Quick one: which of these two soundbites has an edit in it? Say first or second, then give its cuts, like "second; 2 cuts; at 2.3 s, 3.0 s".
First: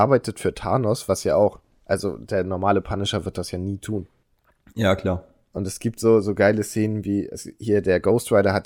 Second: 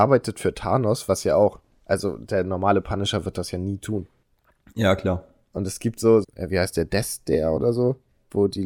second; 1 cut; at 6.2 s